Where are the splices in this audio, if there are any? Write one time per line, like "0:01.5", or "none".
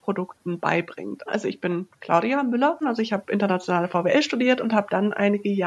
0:01.3
0:02.8